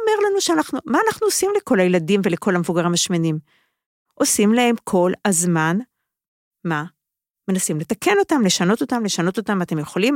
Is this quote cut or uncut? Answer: uncut